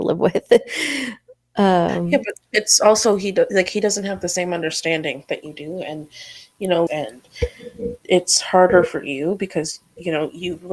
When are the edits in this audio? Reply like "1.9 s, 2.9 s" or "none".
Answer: 6.9 s, 8.0 s